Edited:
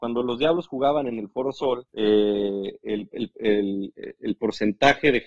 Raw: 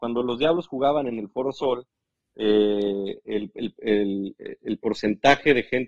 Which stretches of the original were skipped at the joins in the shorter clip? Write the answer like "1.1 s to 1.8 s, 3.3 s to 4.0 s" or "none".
1.9 s to 2.3 s